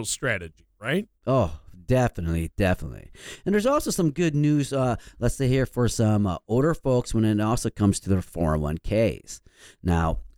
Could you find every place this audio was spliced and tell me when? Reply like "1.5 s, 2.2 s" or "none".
none

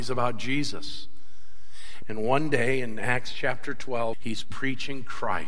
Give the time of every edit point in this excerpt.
2.0 s, 4.1 s

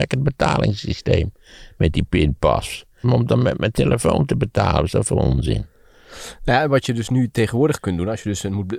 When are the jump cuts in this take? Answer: 3.0 s

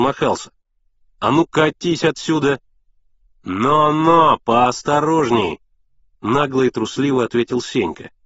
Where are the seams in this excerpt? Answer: none

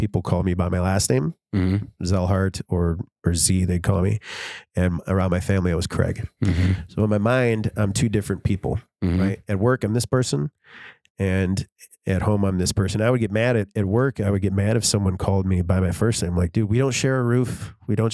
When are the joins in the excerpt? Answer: none

